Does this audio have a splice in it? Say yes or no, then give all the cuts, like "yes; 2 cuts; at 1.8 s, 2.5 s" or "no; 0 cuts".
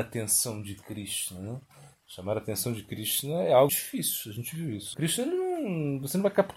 yes; 2 cuts; at 3.7 s, 4.9 s